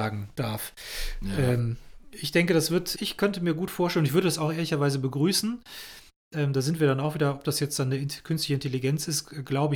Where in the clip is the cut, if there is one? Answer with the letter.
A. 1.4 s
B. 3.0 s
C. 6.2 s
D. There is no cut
B